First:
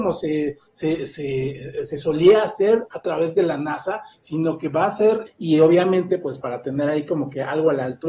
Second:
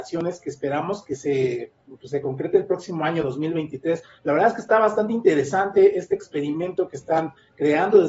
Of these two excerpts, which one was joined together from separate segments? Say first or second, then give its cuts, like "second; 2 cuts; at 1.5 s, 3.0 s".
first; 2 cuts; at 5.3 s, 6.4 s